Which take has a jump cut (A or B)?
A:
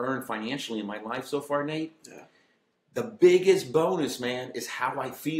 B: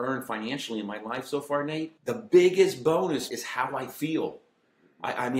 B